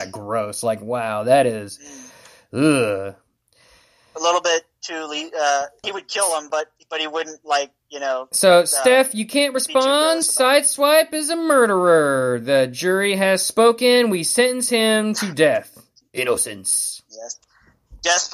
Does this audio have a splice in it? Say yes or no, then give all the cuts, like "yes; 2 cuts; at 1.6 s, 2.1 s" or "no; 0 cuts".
yes; 1 cut; at 5.8 s